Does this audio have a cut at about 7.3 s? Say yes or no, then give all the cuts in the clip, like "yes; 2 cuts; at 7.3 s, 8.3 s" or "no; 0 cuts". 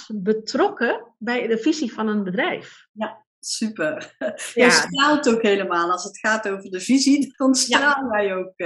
yes; 1 cut; at 7.3 s